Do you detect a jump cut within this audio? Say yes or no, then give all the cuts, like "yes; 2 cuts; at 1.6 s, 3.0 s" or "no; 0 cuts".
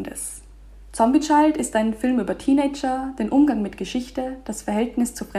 no; 0 cuts